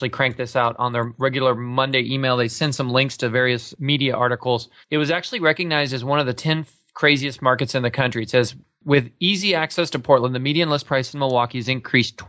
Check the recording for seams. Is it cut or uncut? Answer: cut